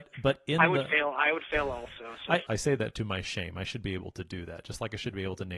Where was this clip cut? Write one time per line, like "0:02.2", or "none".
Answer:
0:02.5